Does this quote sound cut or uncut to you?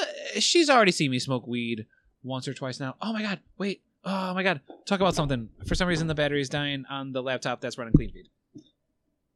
uncut